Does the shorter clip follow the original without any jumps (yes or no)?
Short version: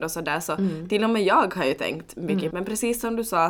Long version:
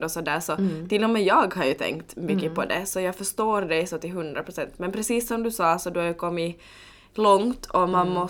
no